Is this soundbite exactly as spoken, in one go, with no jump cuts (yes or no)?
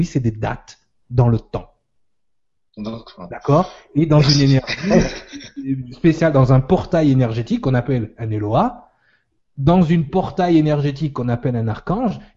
yes